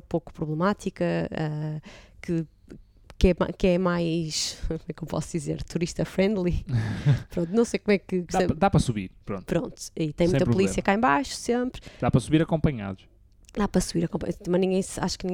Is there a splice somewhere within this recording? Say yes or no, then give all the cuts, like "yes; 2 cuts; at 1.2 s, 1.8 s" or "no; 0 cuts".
no; 0 cuts